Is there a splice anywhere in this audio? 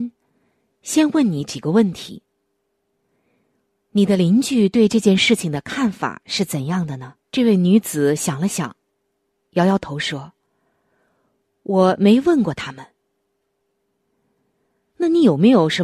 yes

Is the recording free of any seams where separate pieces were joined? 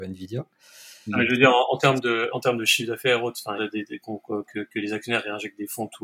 no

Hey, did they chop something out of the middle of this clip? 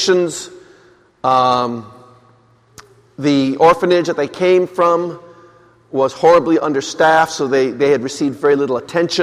no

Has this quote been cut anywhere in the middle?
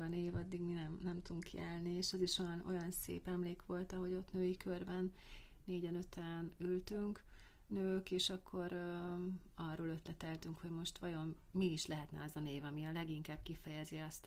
no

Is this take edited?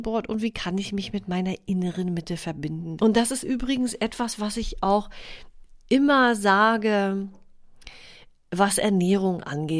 yes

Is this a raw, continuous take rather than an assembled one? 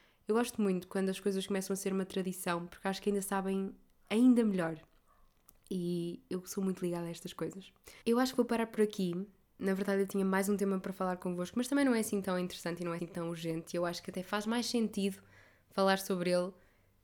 no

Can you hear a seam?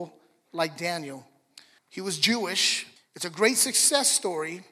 yes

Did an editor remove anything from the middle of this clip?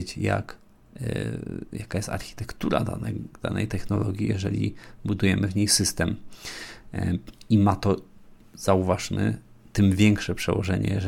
no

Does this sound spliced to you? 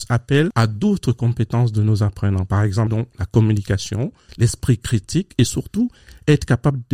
yes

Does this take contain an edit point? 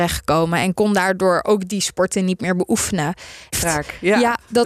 yes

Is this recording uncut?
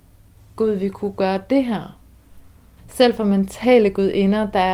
no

